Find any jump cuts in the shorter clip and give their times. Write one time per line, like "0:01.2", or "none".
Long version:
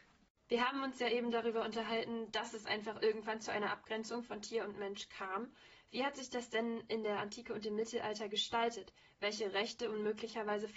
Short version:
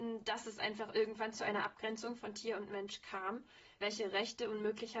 0:03.8